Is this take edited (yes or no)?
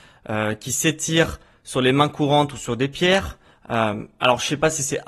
no